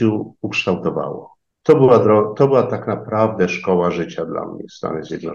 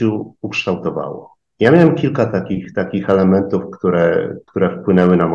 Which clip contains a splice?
first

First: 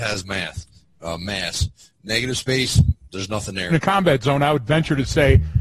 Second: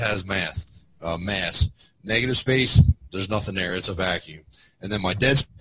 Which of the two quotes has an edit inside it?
first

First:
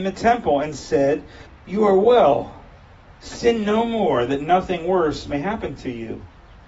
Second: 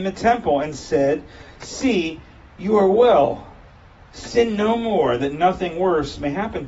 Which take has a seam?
first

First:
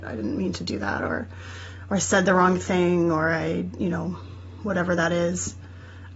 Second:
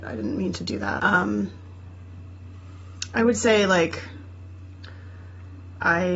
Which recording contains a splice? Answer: second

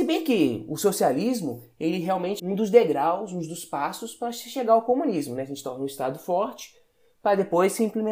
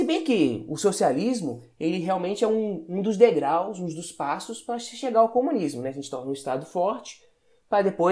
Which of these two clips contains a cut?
first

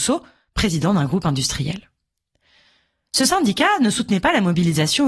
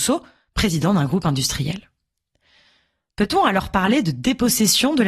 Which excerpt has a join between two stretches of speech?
second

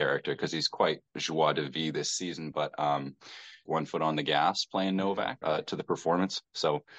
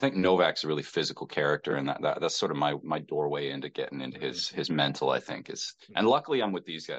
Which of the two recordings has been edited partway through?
first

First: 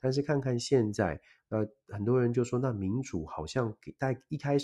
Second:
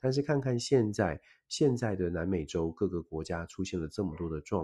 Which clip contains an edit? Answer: first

